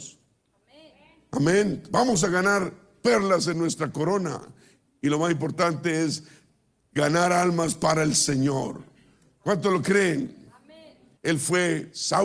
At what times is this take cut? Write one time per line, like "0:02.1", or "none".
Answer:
0:11.2

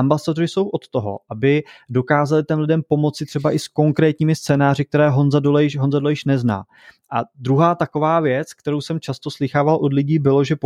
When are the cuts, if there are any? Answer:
none

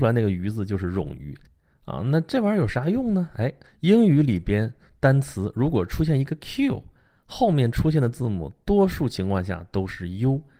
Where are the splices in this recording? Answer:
0:03.6

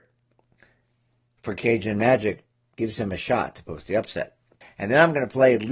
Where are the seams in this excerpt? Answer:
0:04.6

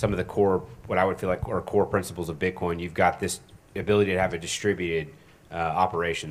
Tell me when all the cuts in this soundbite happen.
none

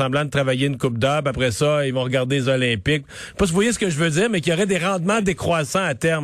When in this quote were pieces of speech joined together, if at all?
none

